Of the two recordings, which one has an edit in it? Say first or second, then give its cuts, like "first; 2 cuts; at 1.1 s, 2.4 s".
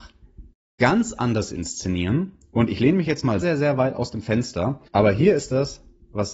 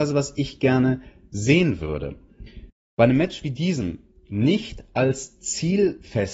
first; 2 cuts; at 3.4 s, 4.9 s